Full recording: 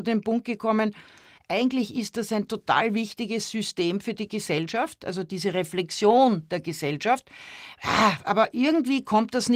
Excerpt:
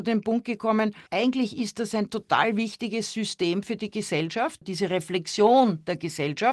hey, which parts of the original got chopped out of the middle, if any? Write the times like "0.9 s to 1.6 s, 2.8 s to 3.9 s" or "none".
1.1 s to 1.4 s, 5.0 s to 5.3 s